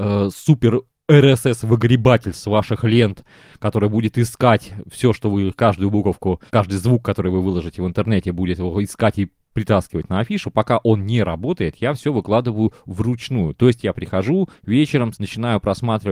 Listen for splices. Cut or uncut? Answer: cut